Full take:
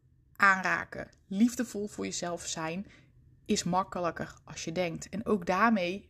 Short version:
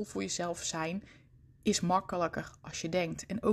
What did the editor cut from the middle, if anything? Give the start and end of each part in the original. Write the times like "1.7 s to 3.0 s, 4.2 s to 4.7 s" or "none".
none